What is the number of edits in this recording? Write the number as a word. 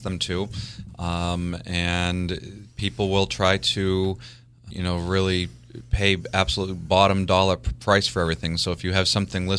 one